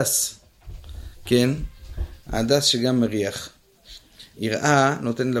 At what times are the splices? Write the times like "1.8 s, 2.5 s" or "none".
4.3 s